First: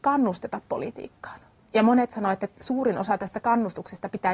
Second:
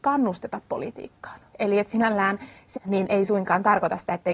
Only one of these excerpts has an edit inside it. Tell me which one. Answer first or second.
second